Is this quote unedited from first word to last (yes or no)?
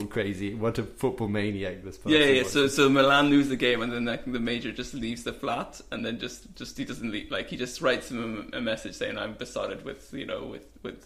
yes